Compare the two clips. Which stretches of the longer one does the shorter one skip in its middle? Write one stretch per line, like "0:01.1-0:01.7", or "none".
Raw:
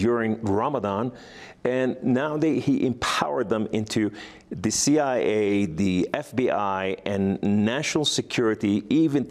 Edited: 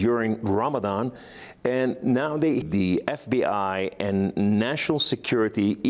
0:02.6-0:05.7